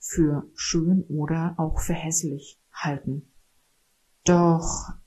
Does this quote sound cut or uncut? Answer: uncut